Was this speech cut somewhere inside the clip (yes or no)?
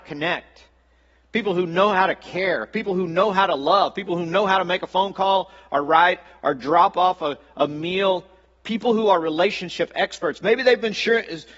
no